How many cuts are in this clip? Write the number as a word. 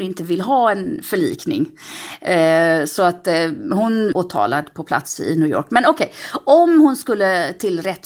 one